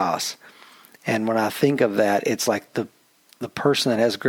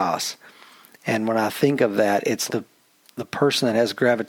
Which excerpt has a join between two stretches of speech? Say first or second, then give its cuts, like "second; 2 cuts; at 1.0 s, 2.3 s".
second; 1 cut; at 2.5 s